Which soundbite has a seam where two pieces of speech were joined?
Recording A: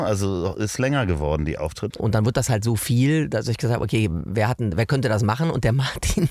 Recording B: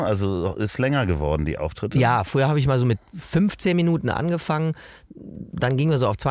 A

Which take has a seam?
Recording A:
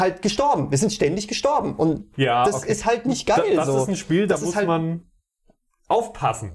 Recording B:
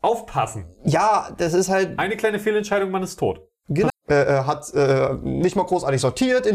B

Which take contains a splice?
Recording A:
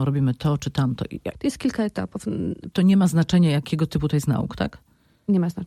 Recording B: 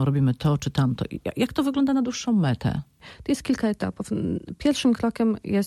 A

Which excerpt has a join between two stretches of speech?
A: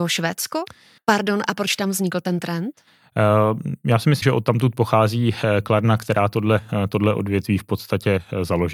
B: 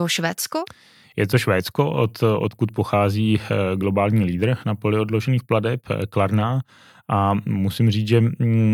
A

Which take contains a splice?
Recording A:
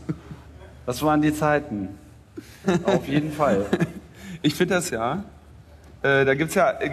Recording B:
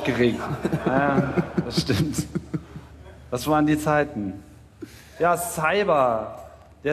A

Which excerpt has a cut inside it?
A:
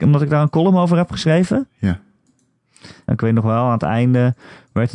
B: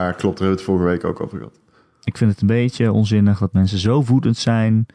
A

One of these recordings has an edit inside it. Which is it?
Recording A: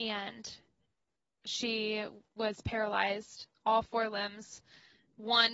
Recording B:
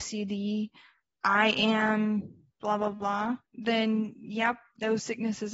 B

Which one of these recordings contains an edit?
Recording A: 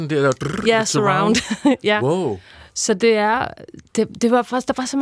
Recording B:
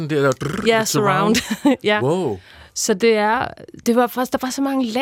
B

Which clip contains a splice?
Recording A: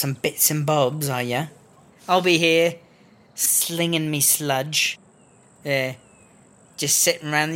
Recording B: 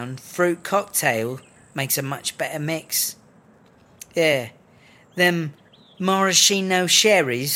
A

